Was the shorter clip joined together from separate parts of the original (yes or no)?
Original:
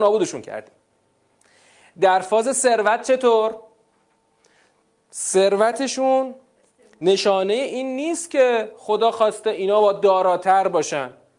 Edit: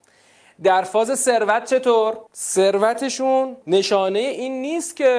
yes